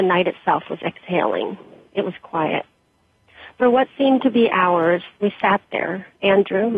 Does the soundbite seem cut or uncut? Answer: uncut